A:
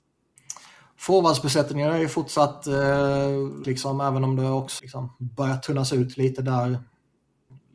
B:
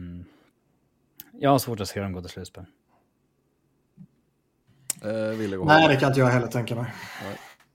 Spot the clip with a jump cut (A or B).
A